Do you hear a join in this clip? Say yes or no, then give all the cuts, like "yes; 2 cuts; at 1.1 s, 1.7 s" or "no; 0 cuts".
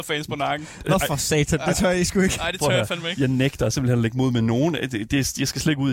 no; 0 cuts